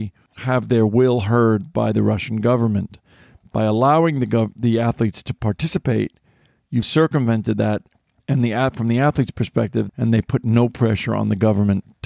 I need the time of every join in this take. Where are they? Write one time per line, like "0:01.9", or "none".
0:06.8
0:09.9